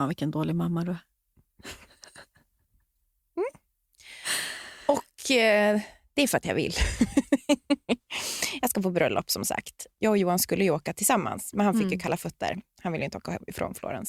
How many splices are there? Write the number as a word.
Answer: zero